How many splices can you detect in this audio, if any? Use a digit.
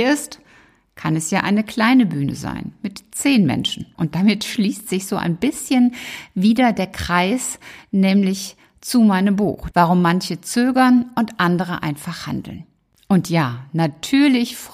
2